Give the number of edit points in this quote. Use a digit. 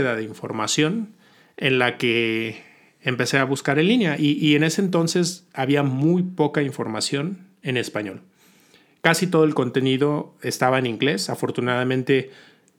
0